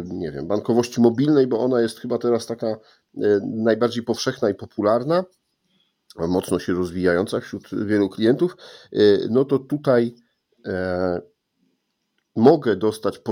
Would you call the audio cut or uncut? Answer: uncut